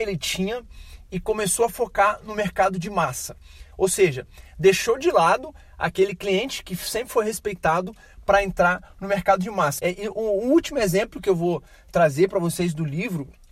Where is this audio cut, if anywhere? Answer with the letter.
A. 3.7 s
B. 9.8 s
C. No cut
B